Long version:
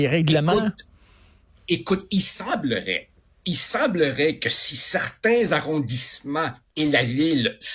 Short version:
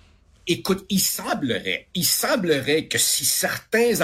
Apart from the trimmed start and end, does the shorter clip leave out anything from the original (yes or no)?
yes